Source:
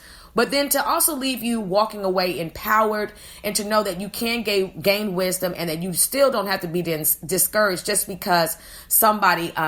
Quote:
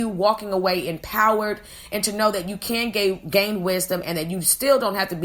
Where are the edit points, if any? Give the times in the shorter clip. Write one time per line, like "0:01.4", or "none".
none